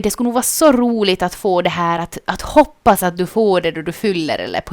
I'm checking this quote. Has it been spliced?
no; 0 cuts

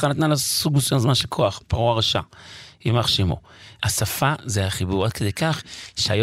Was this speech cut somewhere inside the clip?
yes; 2 cuts; at 1.6 s, 3.8 s

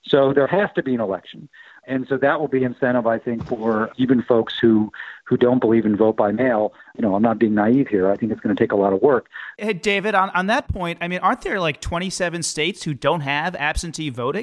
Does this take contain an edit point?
no; 0 cuts

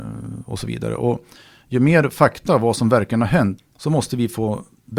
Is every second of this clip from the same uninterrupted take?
no; 1 cut; at 3.6 s

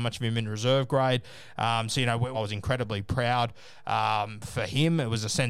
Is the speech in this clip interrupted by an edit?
yes; 1 cut; at 2.3 s

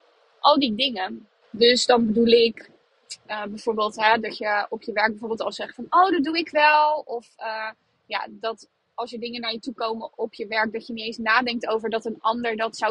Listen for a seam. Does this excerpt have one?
yes; 1 cut; at 1.4 s

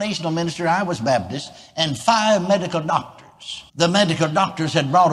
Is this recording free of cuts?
no; 1 cut; at 3.7 s

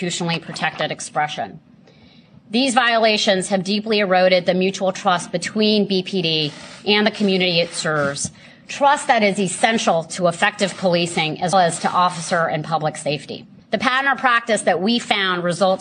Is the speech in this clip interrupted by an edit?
yes; 2 cuts; at 11.5 s, 13.6 s

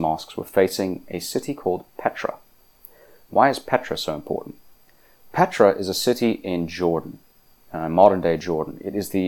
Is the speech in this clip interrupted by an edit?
no; 0 cuts

